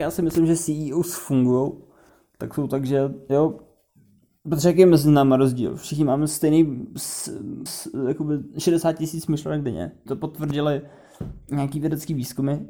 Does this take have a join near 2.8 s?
no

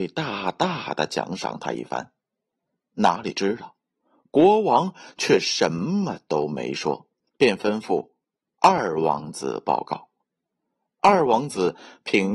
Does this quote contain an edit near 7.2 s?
yes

